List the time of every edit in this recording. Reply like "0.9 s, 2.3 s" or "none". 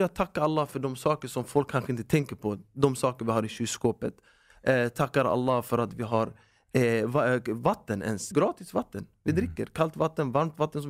8.3 s